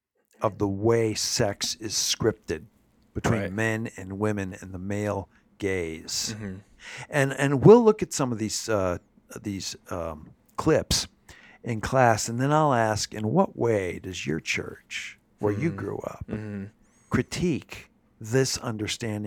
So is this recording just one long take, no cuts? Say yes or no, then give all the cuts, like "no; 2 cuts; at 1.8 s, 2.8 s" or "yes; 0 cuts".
yes; 0 cuts